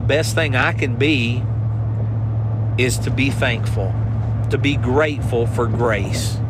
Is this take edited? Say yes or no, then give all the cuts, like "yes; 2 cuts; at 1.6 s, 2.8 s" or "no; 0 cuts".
no; 0 cuts